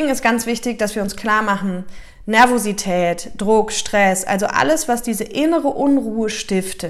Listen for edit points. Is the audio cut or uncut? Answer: uncut